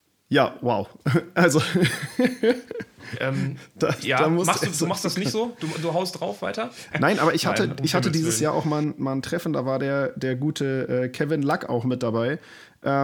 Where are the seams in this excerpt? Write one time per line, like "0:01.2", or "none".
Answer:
0:06.9